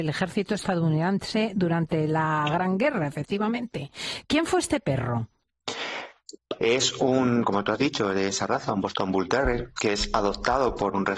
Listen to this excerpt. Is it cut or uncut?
cut